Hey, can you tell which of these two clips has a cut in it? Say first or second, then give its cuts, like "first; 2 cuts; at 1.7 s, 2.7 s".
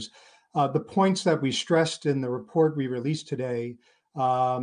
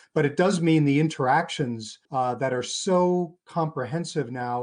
second; 1 cut; at 2.0 s